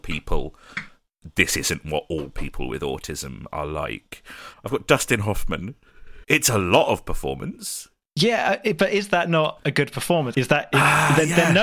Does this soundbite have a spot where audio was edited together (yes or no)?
yes